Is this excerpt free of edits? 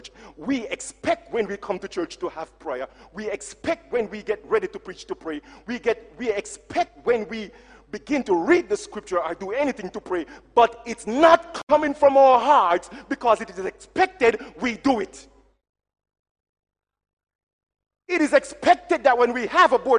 yes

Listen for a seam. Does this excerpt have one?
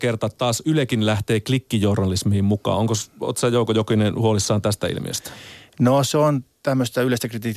no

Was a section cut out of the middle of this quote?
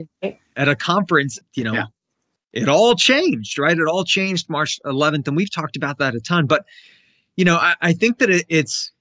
yes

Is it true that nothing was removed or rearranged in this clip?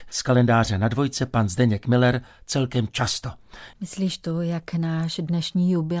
no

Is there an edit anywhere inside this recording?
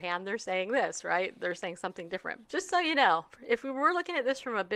yes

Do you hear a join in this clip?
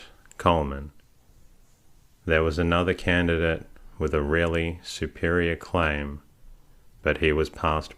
no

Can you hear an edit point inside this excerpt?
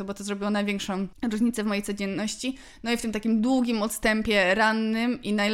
no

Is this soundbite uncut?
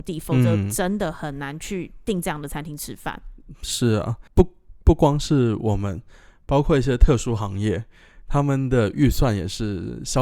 no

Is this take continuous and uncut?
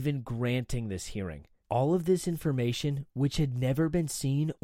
no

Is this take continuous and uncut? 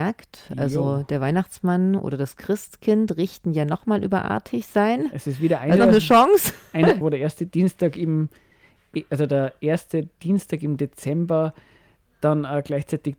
no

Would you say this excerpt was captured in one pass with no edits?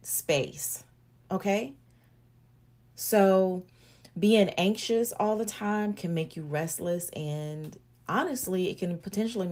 no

